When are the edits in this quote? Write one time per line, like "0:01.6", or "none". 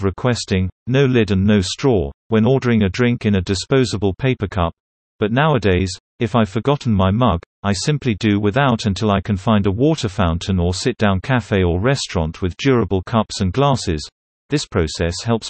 0:02.2